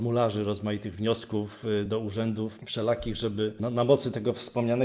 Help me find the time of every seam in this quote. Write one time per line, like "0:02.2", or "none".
0:01.9